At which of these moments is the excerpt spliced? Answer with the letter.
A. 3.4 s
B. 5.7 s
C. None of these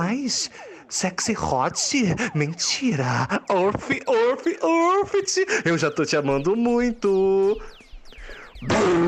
C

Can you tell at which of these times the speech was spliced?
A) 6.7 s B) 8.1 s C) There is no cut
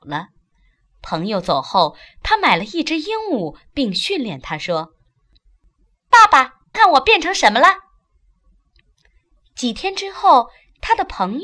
A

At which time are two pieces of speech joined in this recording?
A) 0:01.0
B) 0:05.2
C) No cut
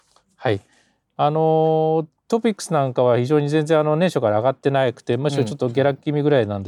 A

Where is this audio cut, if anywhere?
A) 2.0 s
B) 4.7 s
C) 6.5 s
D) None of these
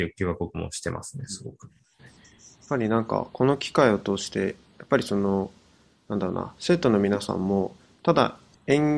A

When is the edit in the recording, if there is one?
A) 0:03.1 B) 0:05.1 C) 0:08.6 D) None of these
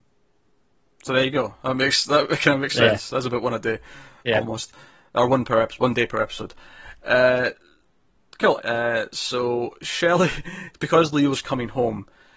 C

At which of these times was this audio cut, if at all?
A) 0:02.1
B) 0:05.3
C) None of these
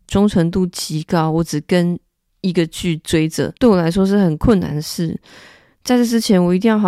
C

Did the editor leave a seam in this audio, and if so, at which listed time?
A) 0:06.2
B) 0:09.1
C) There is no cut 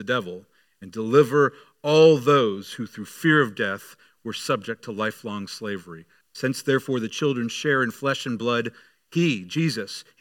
A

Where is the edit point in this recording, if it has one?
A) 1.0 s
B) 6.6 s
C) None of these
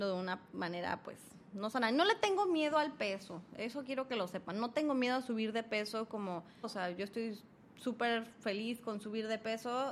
B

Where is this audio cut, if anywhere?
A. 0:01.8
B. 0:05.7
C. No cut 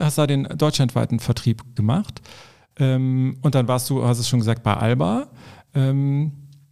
A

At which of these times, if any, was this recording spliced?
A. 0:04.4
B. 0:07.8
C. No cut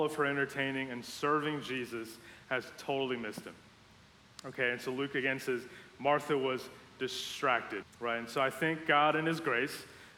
B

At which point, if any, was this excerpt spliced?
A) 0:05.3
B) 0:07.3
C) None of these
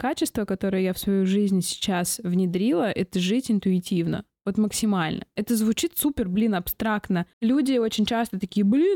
B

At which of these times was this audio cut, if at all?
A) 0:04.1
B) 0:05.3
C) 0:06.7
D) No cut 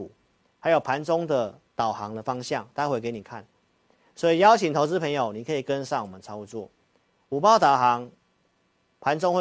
D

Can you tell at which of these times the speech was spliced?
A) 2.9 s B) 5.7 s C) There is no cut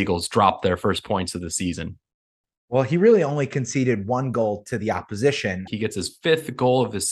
B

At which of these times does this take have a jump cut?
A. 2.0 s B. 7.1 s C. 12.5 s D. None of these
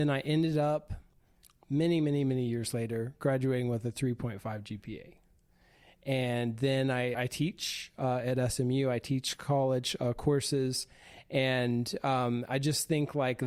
B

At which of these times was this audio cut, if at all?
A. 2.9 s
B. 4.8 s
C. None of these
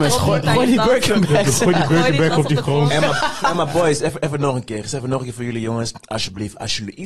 C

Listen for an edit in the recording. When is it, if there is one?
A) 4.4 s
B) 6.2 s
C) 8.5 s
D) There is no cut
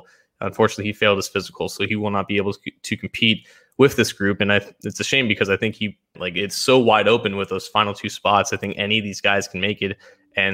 B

